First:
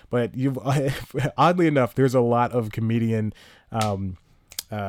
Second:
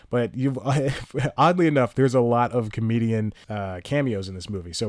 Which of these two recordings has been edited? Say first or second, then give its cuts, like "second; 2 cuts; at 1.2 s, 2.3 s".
second; 1 cut; at 3.4 s